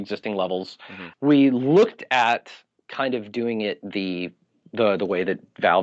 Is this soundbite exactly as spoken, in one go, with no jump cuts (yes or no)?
no